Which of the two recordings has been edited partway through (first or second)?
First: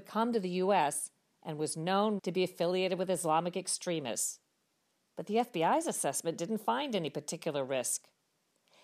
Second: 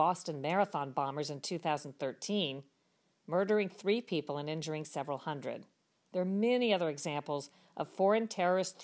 first